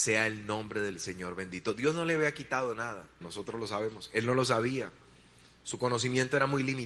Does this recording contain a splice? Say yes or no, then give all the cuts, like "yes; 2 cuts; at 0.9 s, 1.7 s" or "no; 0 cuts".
yes; 1 cut; at 3.2 s